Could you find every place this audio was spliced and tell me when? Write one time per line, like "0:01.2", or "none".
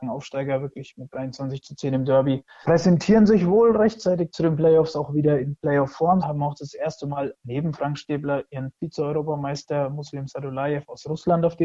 0:02.6
0:06.2